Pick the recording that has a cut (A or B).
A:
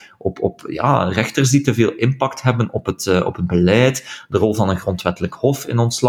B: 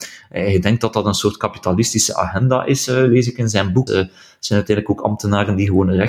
B